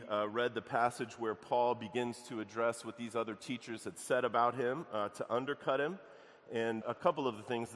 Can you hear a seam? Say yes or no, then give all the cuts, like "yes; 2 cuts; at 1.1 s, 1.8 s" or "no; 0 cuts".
yes; 1 cut; at 6.8 s